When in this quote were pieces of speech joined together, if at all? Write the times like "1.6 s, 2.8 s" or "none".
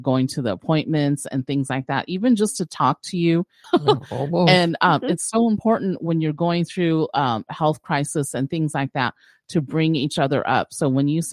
3.6 s